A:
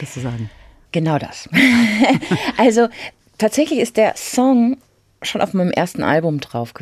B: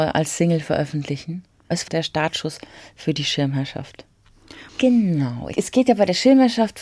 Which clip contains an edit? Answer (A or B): B